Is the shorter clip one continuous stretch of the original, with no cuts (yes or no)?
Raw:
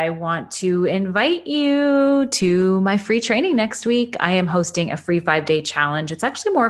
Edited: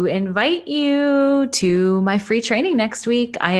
yes